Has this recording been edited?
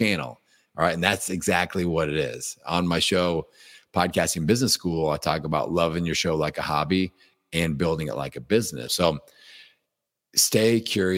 yes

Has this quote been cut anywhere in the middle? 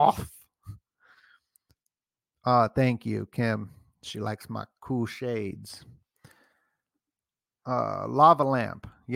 no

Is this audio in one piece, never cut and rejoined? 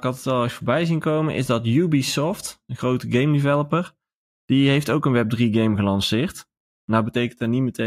yes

